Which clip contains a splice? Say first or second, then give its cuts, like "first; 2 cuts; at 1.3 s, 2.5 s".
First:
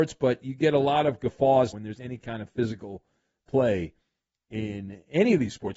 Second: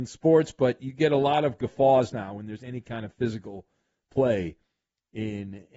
first; 1 cut; at 1.7 s